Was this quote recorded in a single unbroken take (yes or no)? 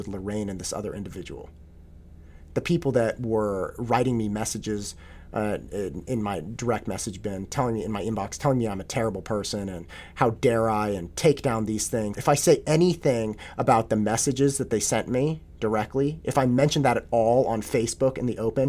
no